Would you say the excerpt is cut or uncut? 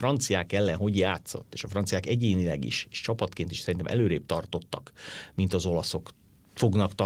uncut